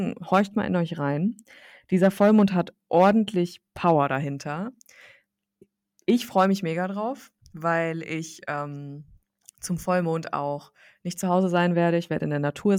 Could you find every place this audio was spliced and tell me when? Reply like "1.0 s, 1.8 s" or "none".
none

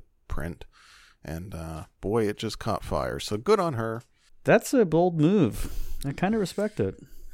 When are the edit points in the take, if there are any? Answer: 4.3 s

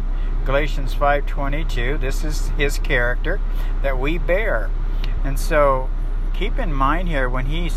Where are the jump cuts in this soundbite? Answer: 5.2 s

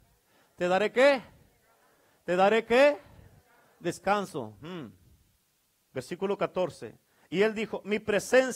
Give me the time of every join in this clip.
5.9 s

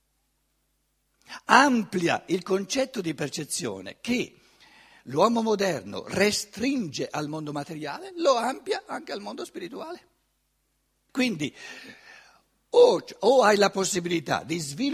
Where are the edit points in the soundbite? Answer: 11.1 s

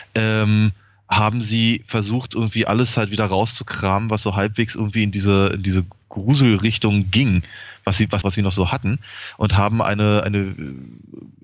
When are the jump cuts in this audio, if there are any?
8.2 s

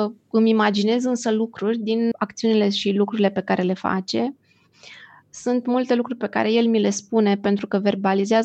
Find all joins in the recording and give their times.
2.1 s

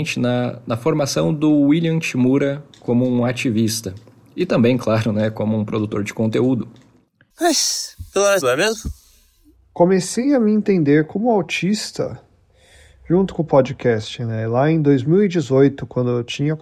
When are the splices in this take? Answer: 7.3 s, 8.4 s

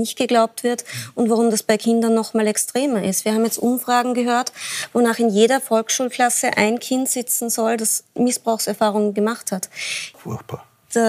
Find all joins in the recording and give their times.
8.2 s, 10.1 s

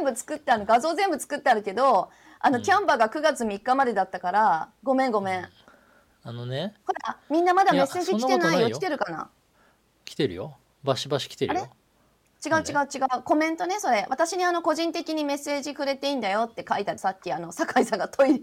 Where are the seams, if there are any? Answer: 17.0 s

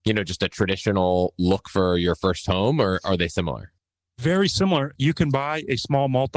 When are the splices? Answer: 4.9 s

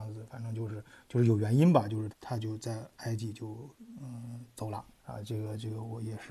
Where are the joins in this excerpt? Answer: 2.1 s, 5.0 s

